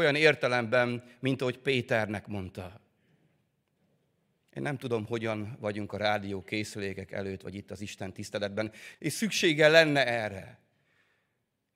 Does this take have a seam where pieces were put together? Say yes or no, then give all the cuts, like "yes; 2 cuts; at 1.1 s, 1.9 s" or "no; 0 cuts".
yes; 1 cut; at 8.9 s